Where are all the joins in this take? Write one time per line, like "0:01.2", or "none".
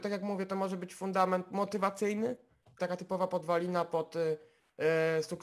0:02.8